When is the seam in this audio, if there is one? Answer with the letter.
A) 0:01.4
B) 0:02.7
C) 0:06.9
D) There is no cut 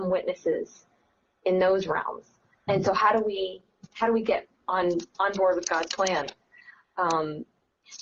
B